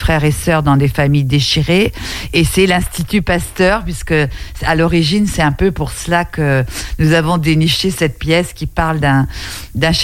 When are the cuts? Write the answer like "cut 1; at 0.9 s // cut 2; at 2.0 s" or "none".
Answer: none

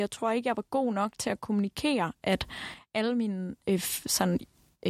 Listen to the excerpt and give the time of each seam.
none

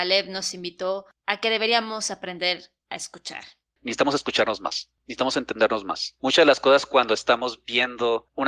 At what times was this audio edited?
none

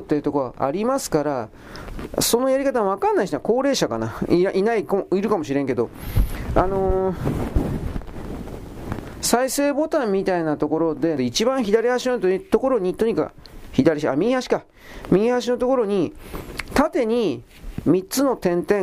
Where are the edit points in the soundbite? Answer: cut 1; at 11.2 s

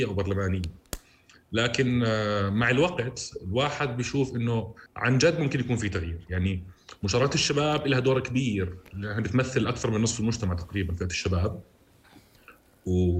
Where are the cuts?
cut 1; at 4.9 s

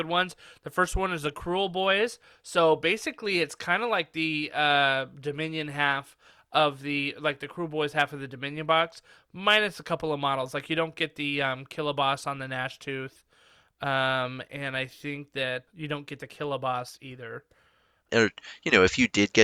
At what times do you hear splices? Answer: cut 1; at 15.7 s // cut 2; at 18.1 s

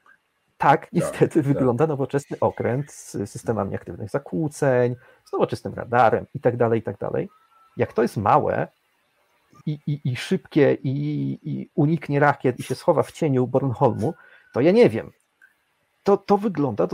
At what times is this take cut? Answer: cut 1; at 9.6 s

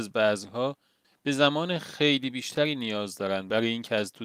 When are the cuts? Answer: none

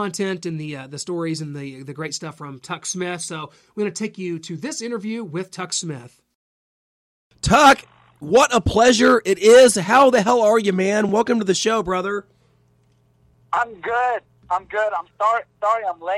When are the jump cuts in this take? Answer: none

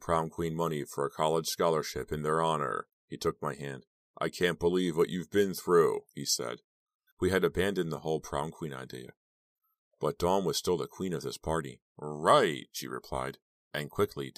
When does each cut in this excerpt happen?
cut 1; at 7.1 s // cut 2; at 11.8 s

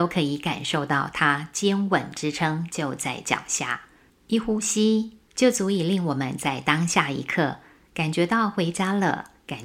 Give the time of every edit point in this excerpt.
cut 1; at 4.1 s // cut 2; at 5.3 s

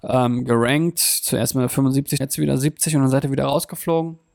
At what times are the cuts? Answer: cut 1; at 2.2 s

